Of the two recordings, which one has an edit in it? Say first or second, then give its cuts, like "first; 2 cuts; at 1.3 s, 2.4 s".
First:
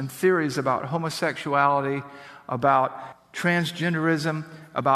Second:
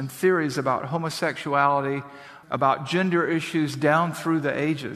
second; 1 cut; at 2.4 s